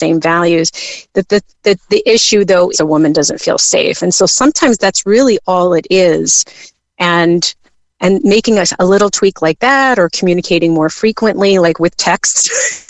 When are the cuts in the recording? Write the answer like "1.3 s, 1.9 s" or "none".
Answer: 2.7 s